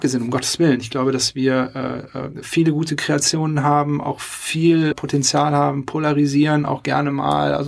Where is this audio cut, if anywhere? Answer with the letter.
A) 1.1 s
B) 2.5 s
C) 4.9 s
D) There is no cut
C